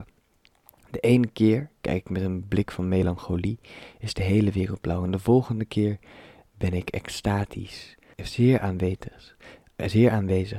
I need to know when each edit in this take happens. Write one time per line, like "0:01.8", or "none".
0:08.1